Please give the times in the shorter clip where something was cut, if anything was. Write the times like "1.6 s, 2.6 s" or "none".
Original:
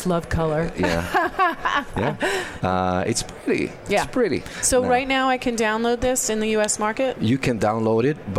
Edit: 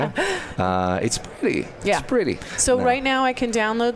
none

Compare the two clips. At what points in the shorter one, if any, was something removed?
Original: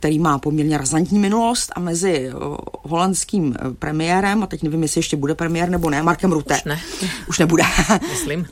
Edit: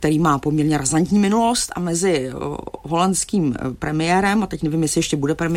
none

